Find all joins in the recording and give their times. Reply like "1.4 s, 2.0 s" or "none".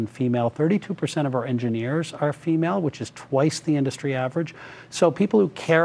none